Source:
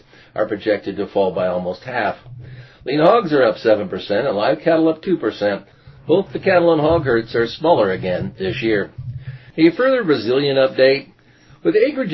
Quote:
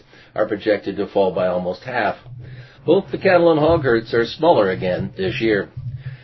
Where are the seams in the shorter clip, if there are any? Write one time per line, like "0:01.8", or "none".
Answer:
0:02.8

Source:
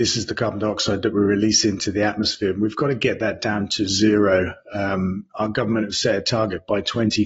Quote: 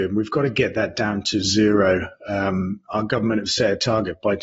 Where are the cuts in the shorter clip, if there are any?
none

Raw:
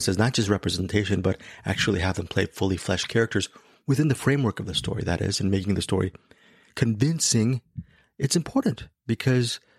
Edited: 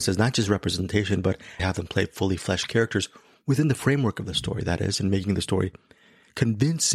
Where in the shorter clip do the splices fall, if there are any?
0:01.6

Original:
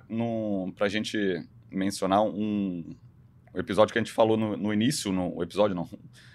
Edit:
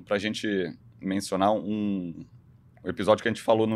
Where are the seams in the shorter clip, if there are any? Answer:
none

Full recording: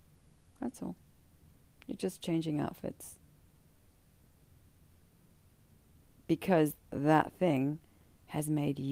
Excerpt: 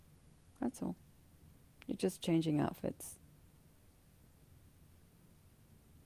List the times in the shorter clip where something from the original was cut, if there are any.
none

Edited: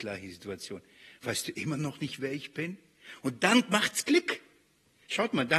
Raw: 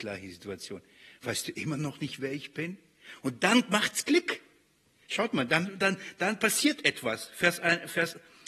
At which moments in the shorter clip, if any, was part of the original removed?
none

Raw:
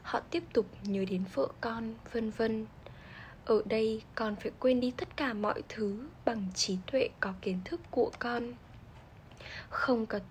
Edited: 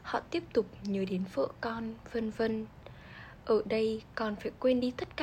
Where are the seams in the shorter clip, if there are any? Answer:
none

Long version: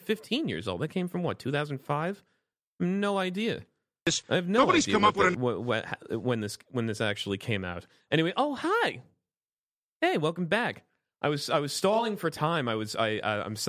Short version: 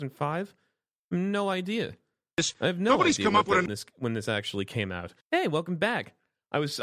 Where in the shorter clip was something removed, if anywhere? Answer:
0:03.7
0:05.2

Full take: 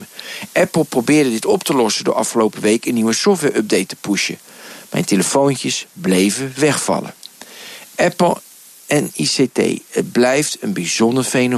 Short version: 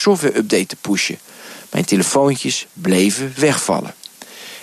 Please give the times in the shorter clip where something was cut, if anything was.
none

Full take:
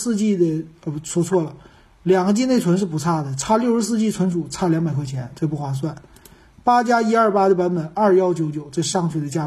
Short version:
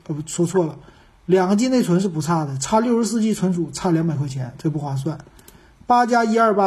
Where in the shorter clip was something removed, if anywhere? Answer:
none

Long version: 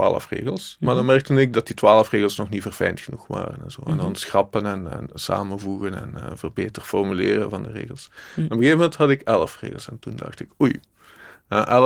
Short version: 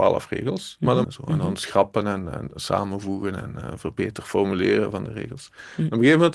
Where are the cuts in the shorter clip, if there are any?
0:01.0

